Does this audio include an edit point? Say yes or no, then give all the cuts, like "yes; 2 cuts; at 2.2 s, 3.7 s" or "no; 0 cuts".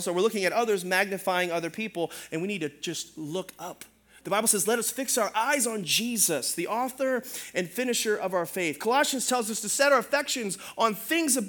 no; 0 cuts